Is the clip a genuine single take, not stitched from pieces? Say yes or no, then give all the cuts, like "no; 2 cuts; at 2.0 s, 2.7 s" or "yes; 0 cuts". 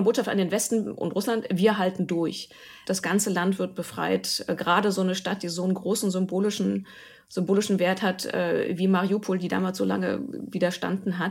no; 1 cut; at 2.8 s